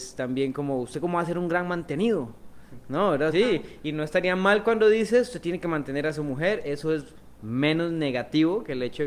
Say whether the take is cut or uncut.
cut